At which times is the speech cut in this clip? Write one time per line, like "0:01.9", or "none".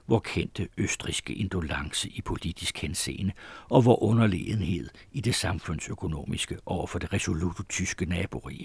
none